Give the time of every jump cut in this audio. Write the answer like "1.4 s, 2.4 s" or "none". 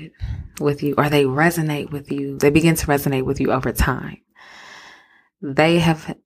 none